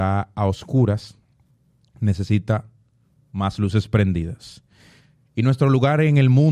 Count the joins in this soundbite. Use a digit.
0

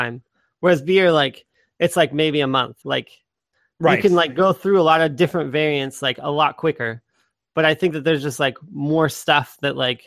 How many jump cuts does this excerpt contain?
1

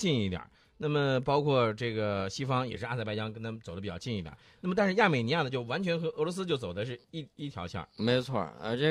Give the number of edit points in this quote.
1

